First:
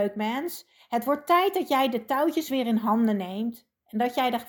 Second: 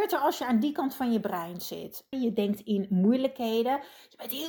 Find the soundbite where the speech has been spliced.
second; 1 cut; at 2.1 s

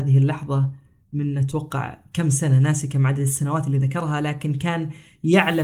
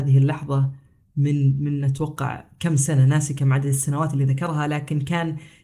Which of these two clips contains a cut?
first; 1 cut; at 1.1 s

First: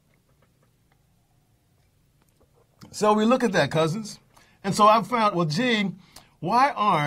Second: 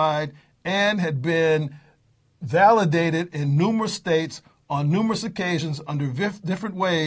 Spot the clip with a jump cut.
first; 1 cut; at 5.3 s

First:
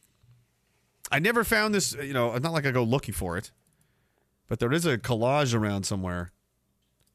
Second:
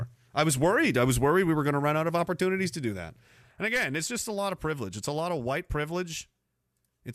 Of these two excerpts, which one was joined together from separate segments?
second; 1 cut; at 3.4 s

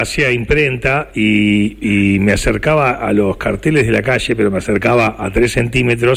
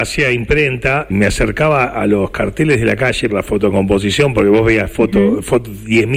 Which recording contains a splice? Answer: second; 2 cuts; at 1.1 s, 3.3 s

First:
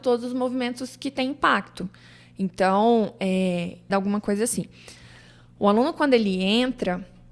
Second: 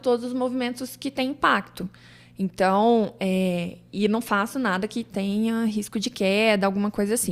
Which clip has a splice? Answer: first; 1 cut; at 3.9 s

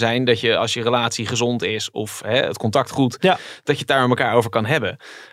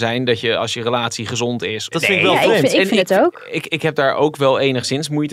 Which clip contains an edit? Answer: second; 1 cut; at 1.9 s

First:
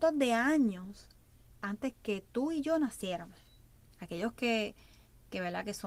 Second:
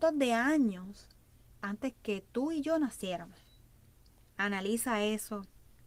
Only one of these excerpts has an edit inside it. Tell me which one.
first; 1 cut; at 3.9 s

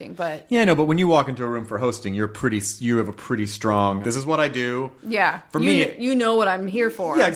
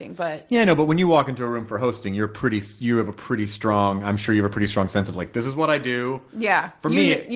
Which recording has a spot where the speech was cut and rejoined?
first; 1 cut; at 4.0 s

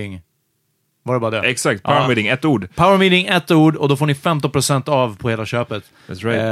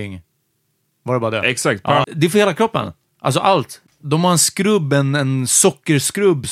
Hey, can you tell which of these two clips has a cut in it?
second; 1 cut; at 2.0 s

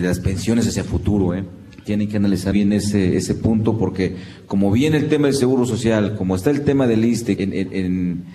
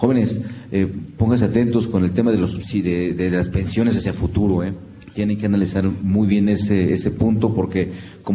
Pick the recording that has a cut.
first; 2 cuts; at 2.5 s, 7.4 s

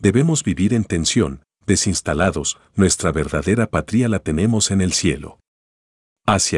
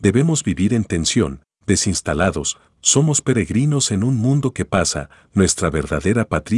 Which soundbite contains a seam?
first; 1 cut; at 2.7 s

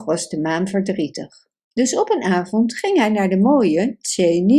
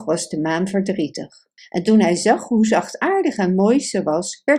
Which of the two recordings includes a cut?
second; 1 cut; at 1.6 s

